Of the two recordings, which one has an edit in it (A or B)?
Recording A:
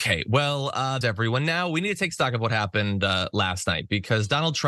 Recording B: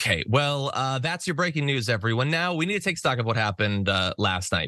A